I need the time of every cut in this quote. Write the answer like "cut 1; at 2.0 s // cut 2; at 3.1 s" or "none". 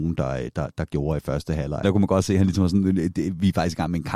cut 1; at 1.8 s